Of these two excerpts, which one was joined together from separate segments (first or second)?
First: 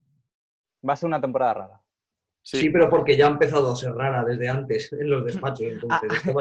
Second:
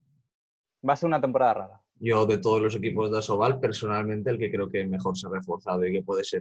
second